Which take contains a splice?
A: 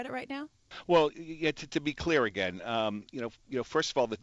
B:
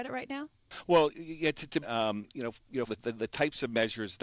B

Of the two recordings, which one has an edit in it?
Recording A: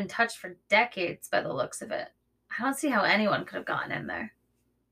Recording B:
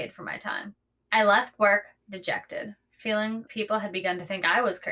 B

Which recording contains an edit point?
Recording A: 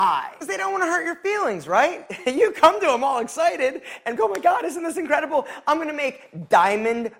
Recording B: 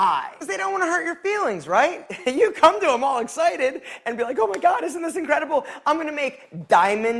A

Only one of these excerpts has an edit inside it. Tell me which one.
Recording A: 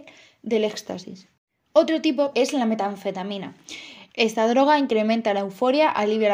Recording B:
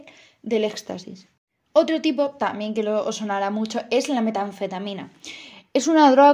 A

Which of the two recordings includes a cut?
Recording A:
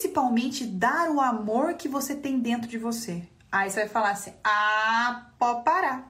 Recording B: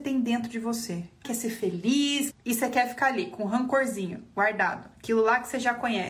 B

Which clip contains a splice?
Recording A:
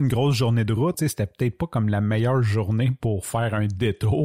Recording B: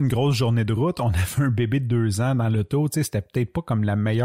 A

